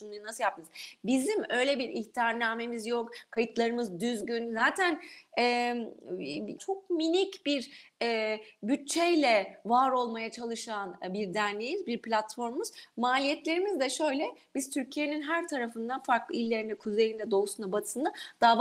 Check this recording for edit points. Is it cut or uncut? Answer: cut